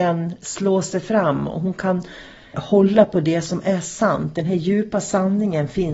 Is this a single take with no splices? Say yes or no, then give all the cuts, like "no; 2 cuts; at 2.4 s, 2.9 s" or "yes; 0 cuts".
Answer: no; 1 cut; at 2.5 s